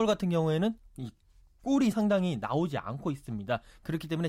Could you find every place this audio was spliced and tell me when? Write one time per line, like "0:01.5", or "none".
none